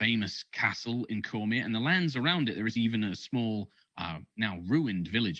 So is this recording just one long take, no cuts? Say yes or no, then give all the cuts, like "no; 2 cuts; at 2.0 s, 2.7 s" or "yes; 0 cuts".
yes; 0 cuts